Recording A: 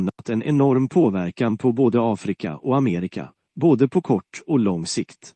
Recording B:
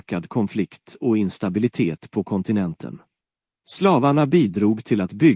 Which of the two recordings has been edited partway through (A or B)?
B